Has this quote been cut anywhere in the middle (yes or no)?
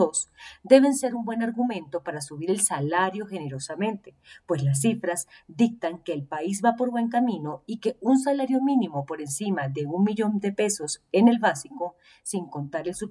no